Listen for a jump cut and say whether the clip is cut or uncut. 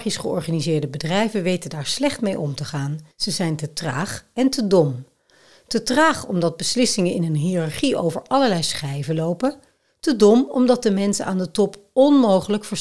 cut